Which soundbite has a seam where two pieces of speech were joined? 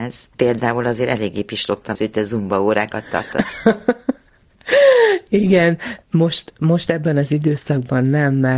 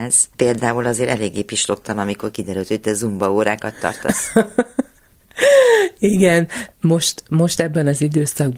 first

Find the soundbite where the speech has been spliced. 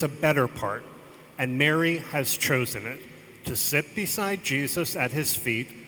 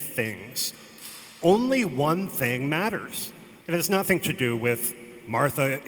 second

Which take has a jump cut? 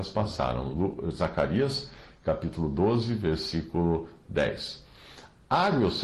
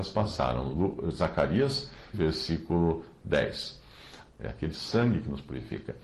second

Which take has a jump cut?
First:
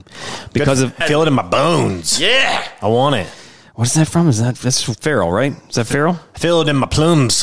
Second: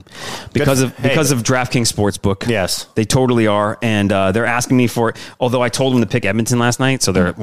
first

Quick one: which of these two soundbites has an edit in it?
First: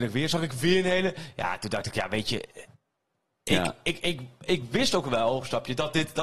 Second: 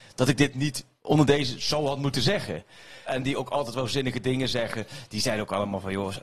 second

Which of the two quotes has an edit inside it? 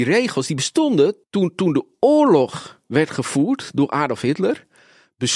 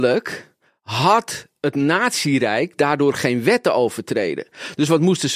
first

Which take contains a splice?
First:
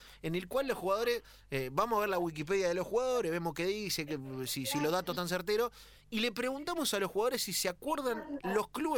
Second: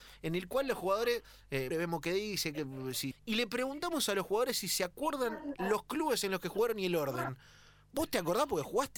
second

